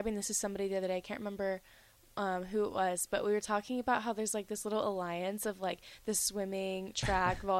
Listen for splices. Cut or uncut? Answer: uncut